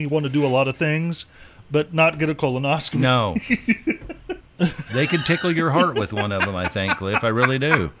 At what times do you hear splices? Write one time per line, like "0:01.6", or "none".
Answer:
0:04.4